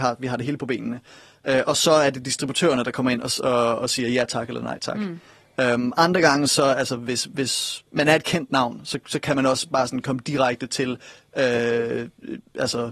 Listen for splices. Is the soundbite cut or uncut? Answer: uncut